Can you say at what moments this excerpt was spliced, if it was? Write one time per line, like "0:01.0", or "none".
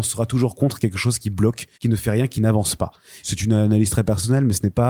0:01.7
0:03.2